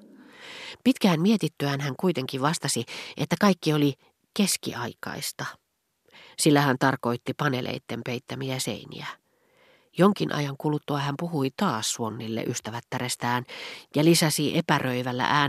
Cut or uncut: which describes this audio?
uncut